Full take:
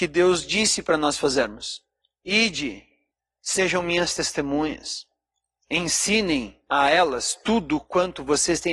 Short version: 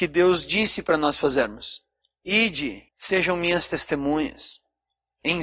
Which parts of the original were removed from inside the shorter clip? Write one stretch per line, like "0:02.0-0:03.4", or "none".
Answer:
0:02.9-0:03.3